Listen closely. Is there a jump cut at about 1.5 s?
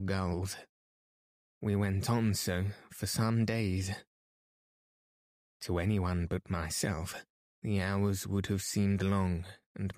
yes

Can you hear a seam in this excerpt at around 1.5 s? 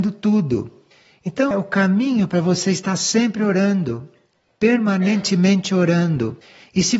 yes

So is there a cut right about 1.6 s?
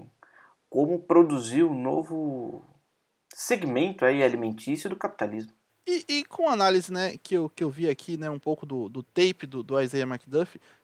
no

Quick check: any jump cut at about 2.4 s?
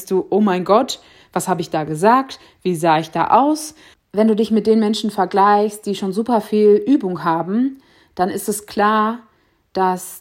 no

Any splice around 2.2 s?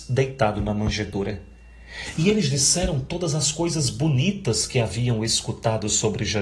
no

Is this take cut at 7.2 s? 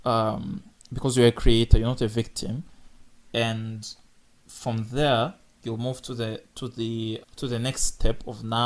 yes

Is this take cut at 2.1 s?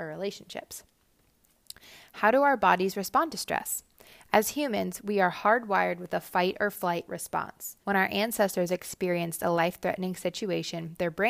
no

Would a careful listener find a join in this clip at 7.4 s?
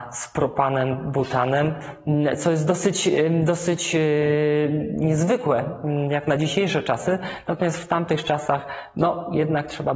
no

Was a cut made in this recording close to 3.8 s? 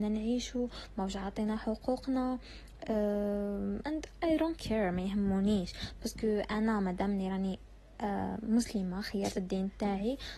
yes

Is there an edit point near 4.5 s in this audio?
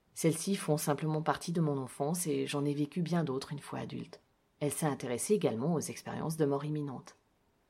yes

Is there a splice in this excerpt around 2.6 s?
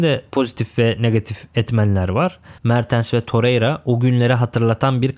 yes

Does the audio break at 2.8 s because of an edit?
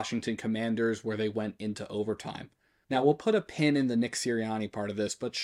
yes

